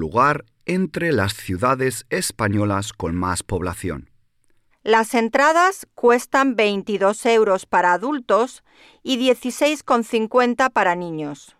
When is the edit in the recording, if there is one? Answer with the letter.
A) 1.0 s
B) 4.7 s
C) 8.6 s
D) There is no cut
B